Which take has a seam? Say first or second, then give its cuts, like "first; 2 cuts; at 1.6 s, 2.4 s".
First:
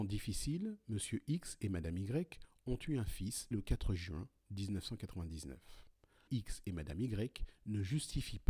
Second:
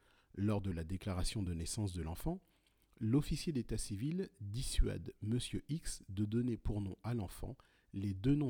first; 2 cuts; at 3.5 s, 6.3 s